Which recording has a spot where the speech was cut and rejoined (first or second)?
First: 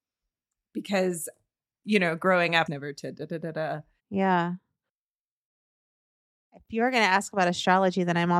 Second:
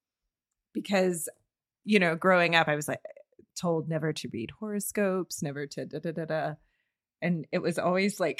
first